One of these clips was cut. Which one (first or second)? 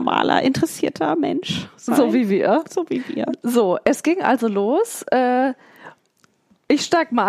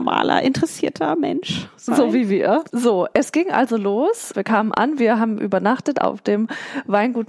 second